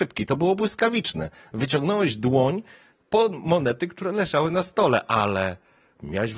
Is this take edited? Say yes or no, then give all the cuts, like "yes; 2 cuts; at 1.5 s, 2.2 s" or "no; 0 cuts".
no; 0 cuts